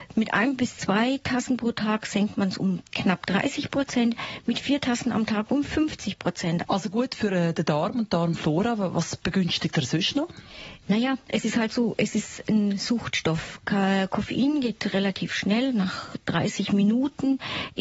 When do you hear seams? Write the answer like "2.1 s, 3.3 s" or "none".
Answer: 6.6 s, 10.8 s